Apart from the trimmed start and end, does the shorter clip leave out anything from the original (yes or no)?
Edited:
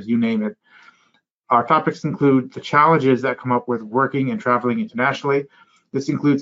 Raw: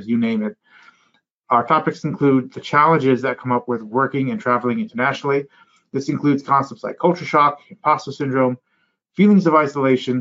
no